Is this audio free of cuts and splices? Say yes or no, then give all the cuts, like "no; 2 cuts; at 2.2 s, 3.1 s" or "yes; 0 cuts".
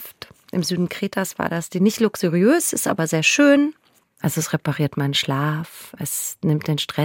no; 2 cuts; at 4.0 s, 5.9 s